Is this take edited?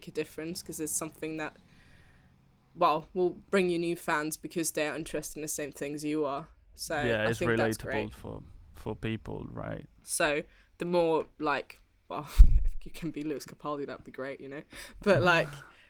yes; 1 cut; at 10.0 s

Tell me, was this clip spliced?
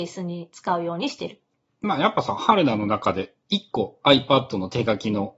no; 0 cuts

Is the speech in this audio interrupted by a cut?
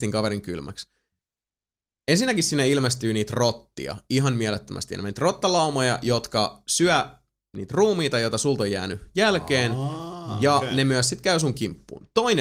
no; 0 cuts

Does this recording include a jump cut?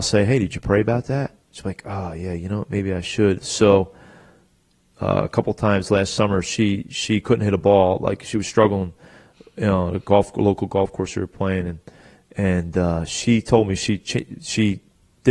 no; 0 cuts

